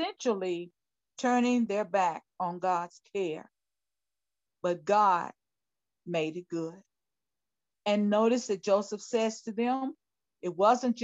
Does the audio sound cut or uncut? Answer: cut